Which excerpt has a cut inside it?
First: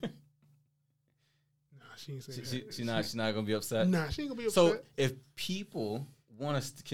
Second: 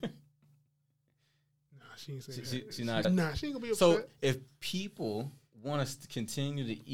second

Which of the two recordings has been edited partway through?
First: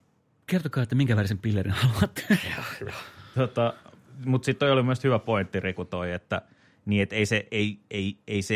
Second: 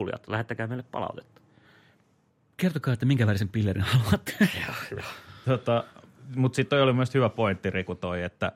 first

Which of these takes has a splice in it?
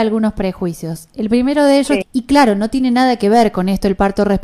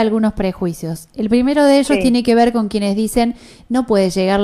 first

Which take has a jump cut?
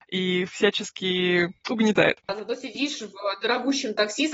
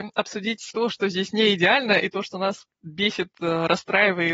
first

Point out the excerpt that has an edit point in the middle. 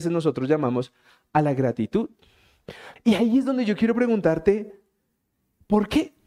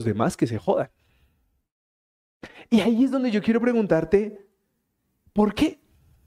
first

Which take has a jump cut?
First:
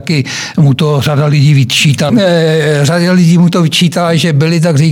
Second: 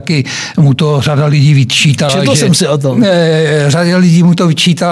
first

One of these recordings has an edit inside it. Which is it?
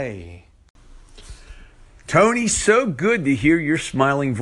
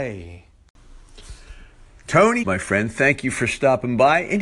second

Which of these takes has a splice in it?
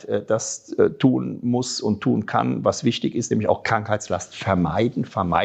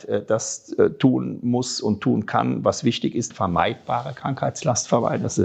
second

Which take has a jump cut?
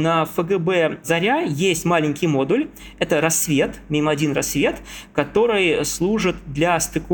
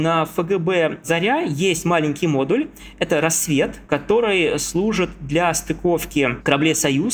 second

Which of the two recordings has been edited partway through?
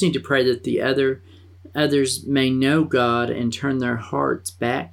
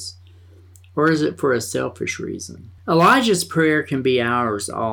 second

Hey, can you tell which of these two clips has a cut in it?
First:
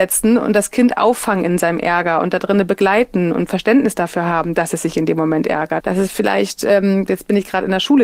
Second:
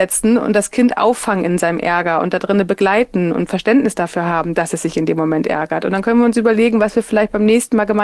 first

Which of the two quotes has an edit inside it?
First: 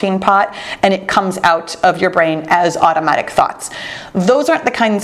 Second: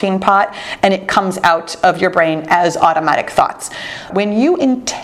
second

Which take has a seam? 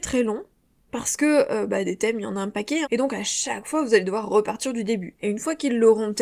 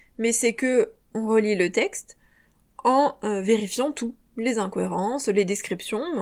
first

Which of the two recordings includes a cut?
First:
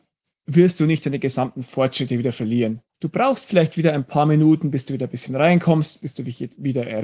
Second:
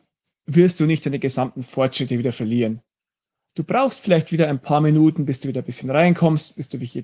first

